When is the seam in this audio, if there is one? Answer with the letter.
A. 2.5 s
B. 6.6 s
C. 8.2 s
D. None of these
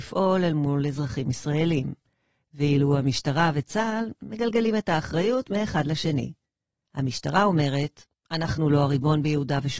D